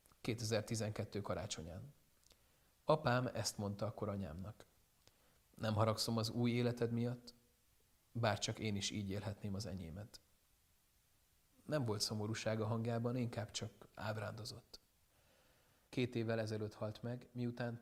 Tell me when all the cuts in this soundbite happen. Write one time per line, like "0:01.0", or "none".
0:15.9